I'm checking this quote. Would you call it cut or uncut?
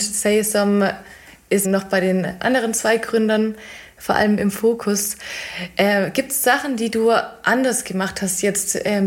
cut